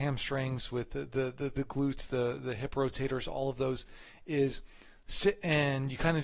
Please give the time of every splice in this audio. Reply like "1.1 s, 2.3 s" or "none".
none

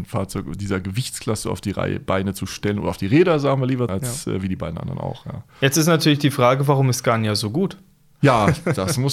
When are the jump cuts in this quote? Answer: 3.9 s

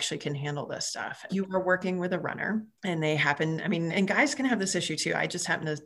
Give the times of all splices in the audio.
1.3 s, 3.9 s

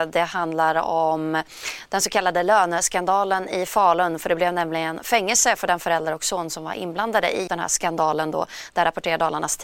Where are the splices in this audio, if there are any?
7.5 s

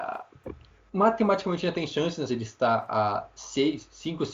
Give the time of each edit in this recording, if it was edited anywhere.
2.3 s

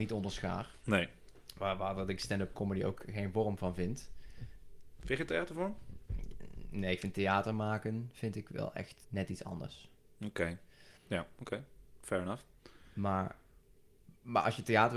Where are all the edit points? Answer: 9.0 s

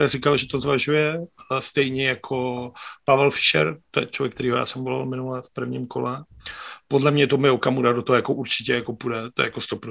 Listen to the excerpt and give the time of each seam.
none

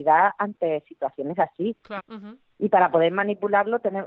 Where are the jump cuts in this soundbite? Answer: 2.0 s

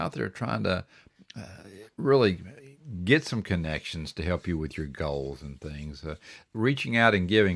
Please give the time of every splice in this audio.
6.5 s

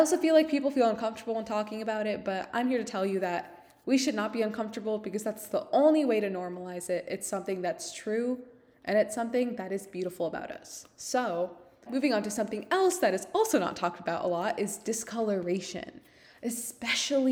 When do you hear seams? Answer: 11.9 s

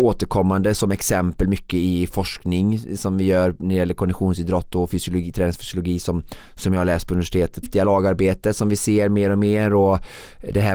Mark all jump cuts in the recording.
7.6 s

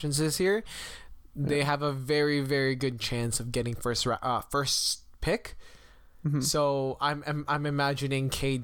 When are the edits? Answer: none

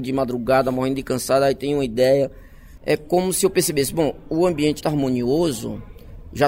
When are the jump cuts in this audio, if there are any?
2.8 s, 4.8 s

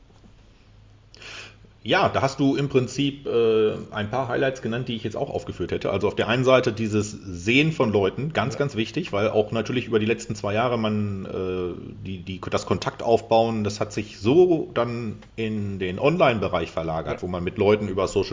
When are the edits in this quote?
15.3 s

